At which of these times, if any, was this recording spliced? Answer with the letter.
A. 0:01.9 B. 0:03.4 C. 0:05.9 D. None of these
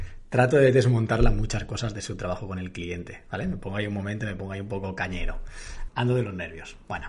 C